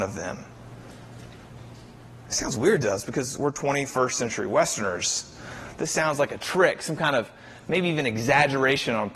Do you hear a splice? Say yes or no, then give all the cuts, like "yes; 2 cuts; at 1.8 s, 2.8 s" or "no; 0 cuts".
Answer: no; 0 cuts